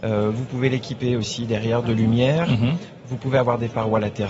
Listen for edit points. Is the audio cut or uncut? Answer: uncut